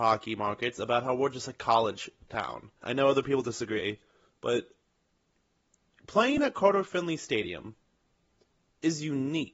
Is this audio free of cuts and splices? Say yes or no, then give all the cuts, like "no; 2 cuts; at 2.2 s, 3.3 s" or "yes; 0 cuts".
no; 1 cut; at 2.8 s